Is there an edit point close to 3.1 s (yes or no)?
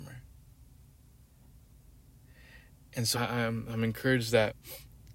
yes